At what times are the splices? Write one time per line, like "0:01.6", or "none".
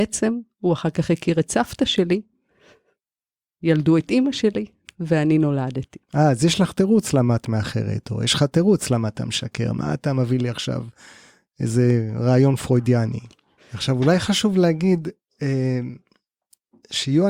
0:06.0
0:13.6